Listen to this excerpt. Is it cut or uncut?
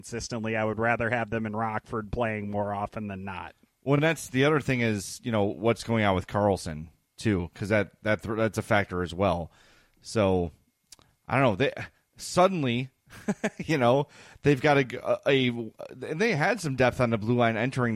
uncut